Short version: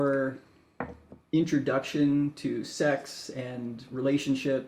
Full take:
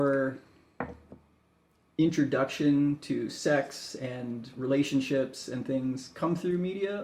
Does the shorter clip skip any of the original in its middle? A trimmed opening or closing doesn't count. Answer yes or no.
yes